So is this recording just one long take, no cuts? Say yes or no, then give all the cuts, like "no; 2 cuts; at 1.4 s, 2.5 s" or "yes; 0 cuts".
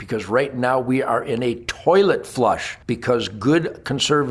no; 1 cut; at 2.8 s